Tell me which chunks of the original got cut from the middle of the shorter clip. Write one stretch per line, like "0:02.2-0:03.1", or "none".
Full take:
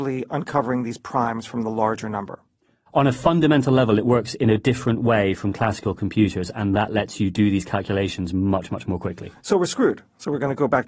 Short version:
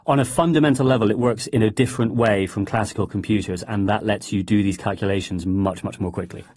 none